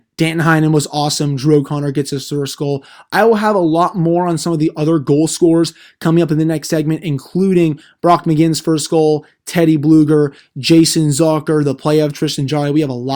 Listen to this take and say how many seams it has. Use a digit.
0